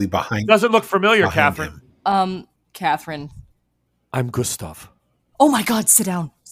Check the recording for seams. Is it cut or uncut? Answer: cut